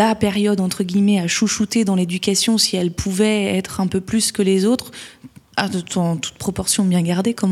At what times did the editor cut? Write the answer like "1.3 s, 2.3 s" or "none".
none